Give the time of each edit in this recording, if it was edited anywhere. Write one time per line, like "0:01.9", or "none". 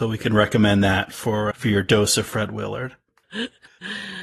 0:01.5
0:03.2